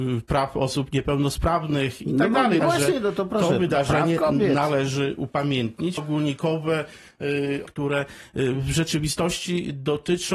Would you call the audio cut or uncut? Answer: cut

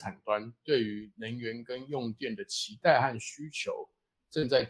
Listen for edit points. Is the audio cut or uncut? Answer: uncut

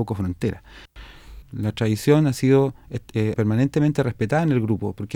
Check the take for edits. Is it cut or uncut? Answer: cut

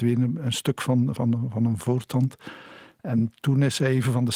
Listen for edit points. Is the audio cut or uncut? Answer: uncut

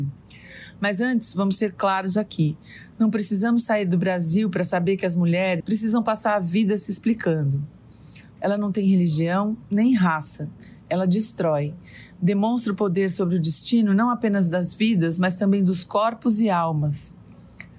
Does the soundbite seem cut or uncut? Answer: cut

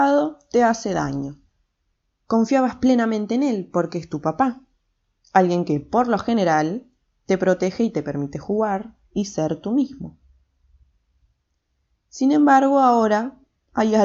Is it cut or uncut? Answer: uncut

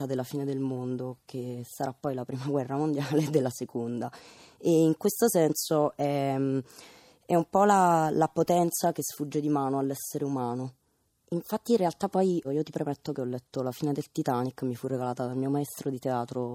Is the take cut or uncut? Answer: cut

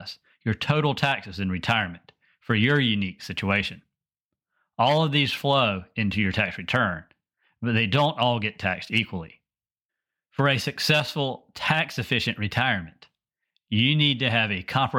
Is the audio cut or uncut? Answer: uncut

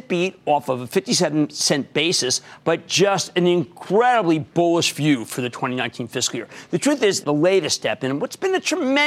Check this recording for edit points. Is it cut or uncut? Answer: cut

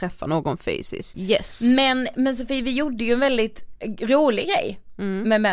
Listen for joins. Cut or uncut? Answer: cut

